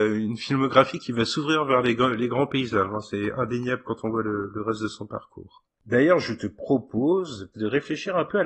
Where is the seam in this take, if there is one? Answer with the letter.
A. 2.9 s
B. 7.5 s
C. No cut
B